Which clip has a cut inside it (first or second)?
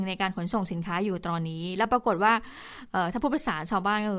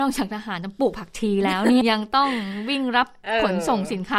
second